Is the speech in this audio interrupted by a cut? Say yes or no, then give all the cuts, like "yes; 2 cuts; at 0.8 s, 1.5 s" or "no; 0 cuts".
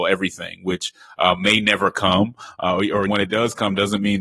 yes; 1 cut; at 3.1 s